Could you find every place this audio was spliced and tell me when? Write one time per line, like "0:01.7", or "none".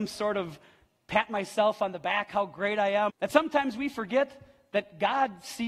0:03.1